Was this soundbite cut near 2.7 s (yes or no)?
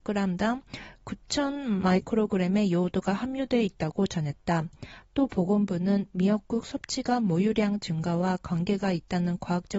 no